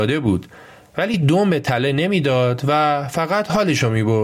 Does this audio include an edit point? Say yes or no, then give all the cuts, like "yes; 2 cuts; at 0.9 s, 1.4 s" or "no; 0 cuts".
no; 0 cuts